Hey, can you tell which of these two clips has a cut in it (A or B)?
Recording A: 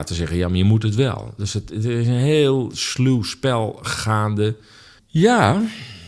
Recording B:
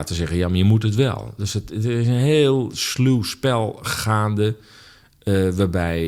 A